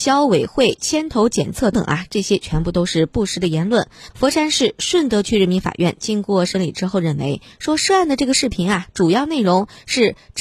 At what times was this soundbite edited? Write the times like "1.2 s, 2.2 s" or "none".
1.7 s, 4.1 s